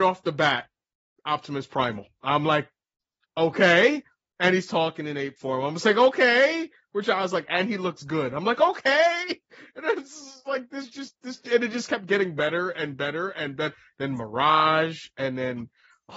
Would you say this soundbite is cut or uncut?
uncut